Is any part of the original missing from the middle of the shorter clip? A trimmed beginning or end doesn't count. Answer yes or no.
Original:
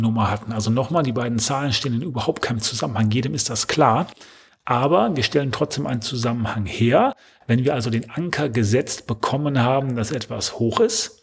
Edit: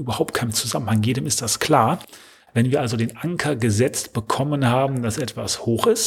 yes